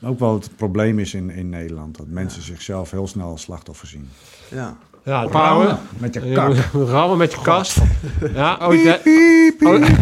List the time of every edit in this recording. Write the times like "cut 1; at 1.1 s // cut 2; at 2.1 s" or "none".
cut 1; at 5.3 s // cut 2; at 8.6 s